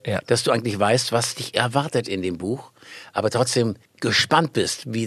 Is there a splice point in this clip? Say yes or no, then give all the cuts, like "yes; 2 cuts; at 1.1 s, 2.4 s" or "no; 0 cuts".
no; 0 cuts